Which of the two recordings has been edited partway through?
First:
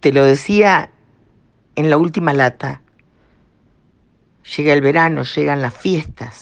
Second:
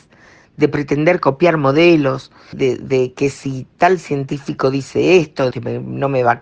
second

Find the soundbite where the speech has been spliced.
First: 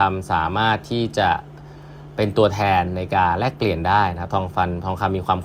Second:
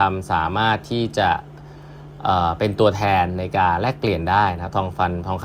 first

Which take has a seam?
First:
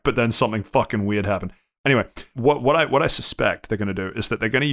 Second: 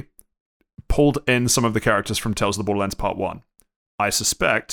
first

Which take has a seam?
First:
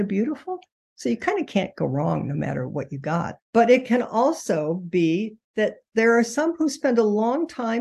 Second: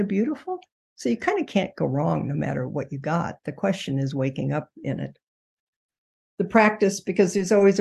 first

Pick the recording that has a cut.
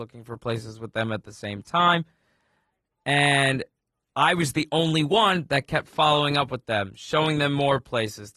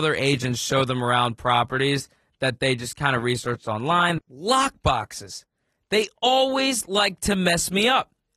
second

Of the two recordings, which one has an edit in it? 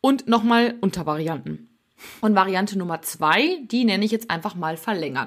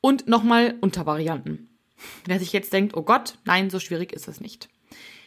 first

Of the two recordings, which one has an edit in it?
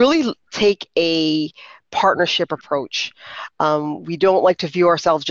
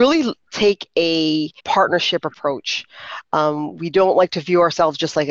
second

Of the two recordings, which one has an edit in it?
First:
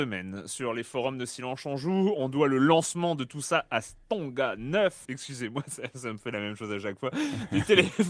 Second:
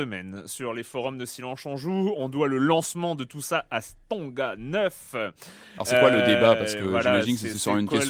first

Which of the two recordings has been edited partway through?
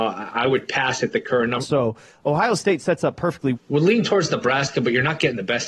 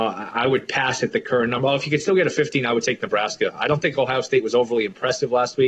first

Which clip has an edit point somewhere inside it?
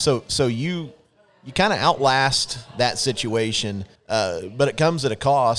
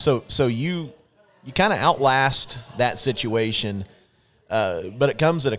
first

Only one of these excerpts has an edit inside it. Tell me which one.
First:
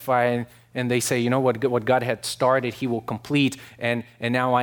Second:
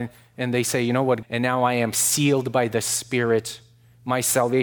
second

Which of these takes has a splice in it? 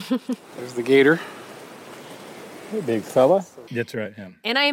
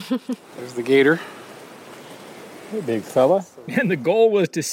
first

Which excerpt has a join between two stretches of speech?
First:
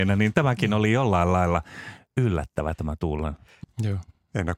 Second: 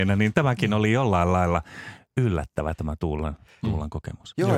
first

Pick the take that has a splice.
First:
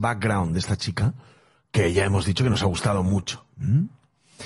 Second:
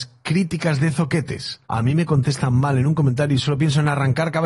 second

